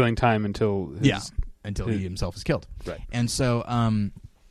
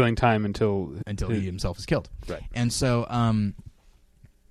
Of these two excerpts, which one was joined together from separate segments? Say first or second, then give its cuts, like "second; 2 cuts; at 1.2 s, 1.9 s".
second; 1 cut; at 1.0 s